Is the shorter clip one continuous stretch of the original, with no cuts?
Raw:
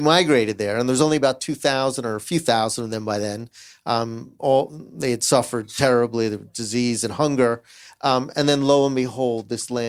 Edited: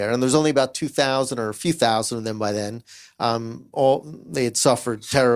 yes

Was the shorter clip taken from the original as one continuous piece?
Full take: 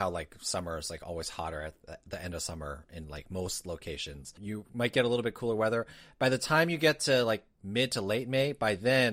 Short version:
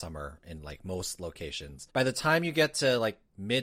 no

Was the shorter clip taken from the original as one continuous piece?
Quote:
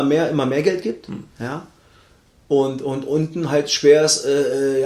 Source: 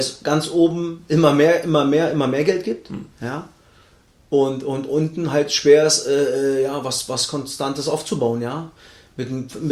yes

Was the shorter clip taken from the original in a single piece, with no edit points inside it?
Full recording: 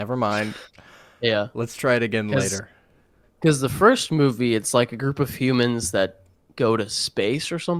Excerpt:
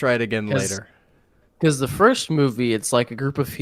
yes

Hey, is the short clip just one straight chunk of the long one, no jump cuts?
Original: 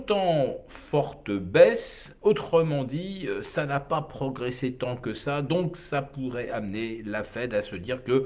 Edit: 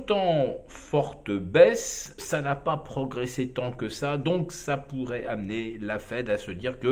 no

